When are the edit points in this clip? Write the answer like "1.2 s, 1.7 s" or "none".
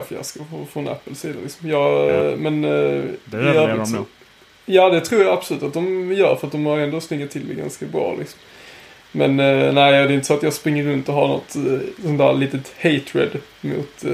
none